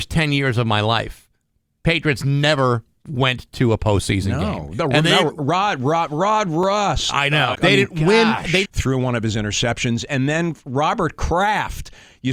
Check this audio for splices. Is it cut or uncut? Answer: cut